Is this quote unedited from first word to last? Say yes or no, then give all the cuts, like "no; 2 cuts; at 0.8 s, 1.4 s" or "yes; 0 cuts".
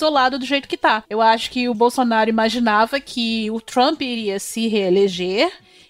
no; 1 cut; at 1.1 s